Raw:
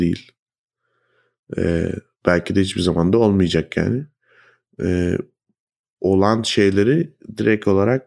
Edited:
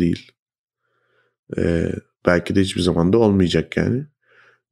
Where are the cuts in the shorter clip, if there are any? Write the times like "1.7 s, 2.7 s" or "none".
none